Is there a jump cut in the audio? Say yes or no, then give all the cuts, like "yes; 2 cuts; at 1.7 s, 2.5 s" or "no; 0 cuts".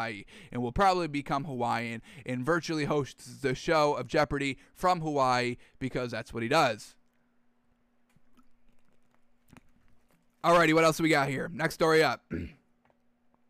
no; 0 cuts